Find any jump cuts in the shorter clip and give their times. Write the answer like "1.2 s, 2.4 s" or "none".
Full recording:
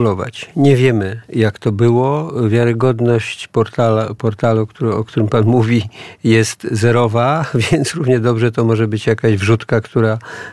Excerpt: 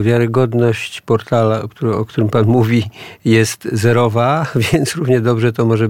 1.7 s